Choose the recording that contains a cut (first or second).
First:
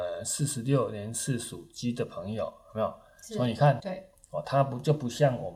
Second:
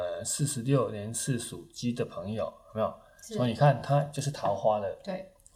first